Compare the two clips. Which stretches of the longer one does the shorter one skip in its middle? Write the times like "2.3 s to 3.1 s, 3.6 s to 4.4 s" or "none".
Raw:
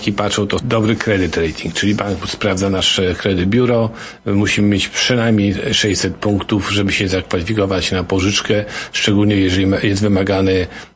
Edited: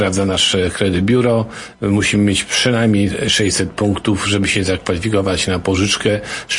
none

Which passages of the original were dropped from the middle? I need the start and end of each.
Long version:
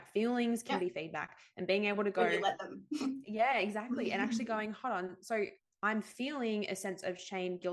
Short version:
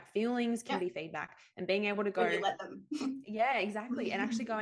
none

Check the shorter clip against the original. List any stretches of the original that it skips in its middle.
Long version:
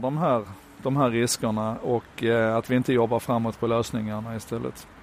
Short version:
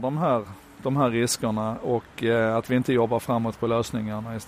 none

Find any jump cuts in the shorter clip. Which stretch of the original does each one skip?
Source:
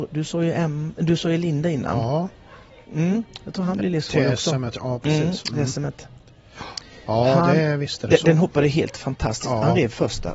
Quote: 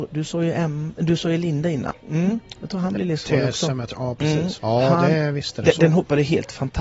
1.9 s to 2.7 s, 5.4 s to 7.0 s

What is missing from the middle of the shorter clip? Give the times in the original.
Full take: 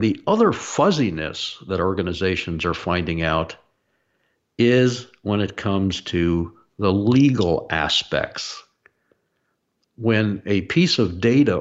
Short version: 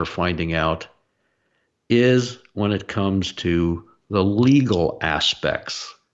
none

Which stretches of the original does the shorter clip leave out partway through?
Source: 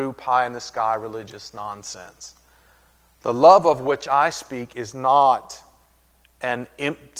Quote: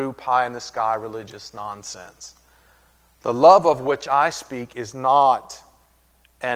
none

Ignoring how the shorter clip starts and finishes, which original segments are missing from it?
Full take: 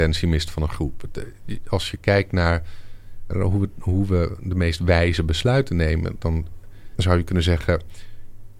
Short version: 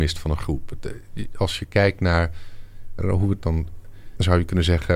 3.7 s to 6.2 s

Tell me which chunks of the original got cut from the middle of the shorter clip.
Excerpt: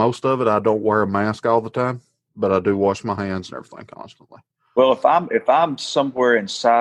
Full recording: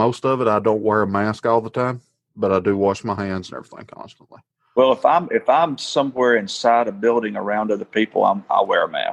none

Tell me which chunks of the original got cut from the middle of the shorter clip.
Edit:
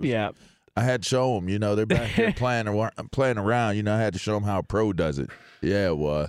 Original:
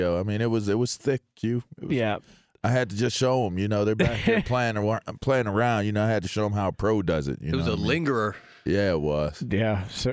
2.9 s to 3.1 s, 7.4 s to 8.3 s

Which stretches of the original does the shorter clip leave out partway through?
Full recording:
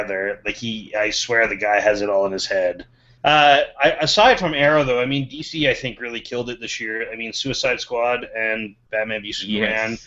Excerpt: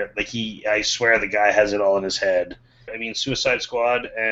3.2 s to 7.1 s

